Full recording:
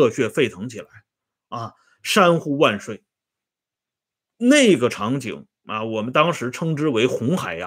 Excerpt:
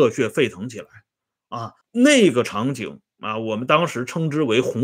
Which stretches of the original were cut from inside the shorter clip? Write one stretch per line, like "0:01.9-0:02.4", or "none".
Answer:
0:01.8-0:04.3